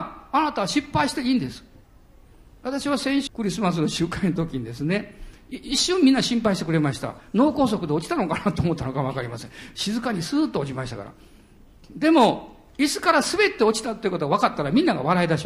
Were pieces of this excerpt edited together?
yes; 1 cut; at 3.3 s

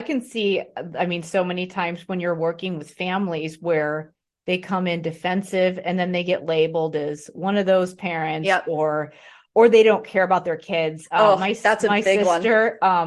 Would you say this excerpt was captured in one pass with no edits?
yes; 0 cuts

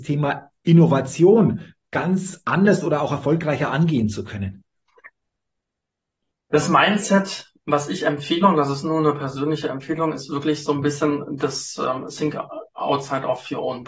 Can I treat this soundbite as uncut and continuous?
yes; 0 cuts

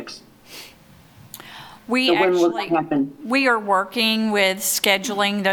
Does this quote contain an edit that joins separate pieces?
no; 0 cuts

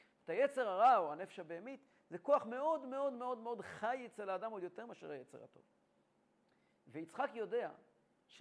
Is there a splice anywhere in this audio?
no; 0 cuts

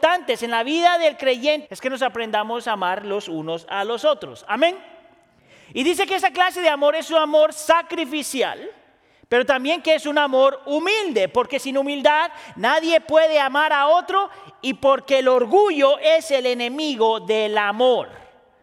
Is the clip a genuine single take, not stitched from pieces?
no; 1 cut; at 1.7 s

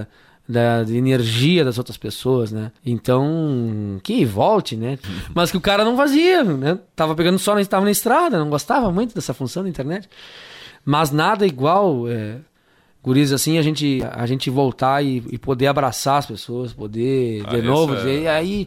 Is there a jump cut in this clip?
yes; 3 cuts; at 2.8 s, 5.0 s, 10.7 s

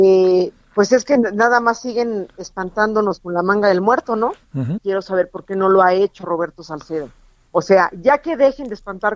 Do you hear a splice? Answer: yes; 1 cut; at 4.8 s

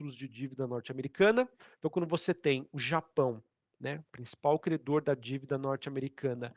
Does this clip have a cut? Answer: yes; 1 cut; at 1.7 s

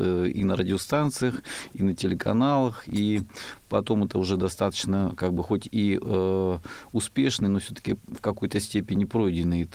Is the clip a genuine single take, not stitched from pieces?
yes; 0 cuts

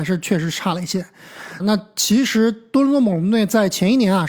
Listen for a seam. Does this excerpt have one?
yes; 1 cut; at 1.6 s

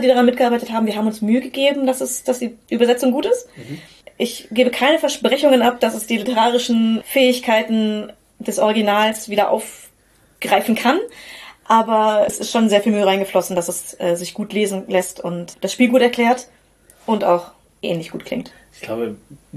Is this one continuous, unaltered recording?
no; 2 cuts; at 15.5 s, 17.7 s

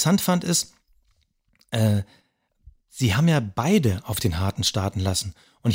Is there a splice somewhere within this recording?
no; 0 cuts

